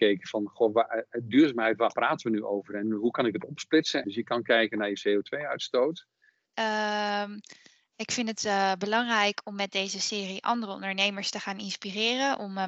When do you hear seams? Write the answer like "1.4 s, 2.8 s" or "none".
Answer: 4.0 s, 6.5 s